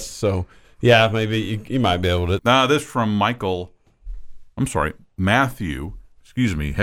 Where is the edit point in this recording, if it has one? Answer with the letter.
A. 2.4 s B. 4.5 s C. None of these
A